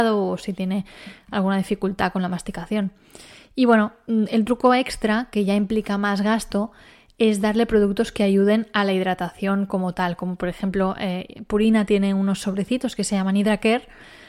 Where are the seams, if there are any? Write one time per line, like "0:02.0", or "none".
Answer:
none